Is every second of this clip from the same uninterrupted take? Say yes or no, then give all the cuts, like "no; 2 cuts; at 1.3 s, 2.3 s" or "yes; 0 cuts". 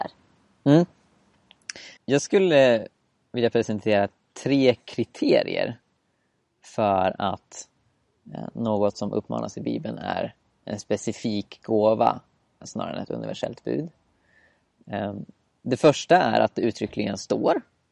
no; 2 cuts; at 2.0 s, 12.6 s